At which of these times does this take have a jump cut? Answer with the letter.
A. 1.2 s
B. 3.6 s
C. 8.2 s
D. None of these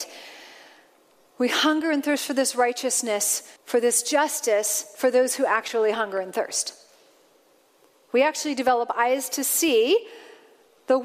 B